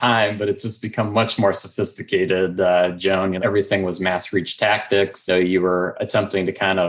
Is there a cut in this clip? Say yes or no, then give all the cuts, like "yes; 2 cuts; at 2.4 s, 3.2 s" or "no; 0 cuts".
yes; 2 cuts; at 3.4 s, 5.3 s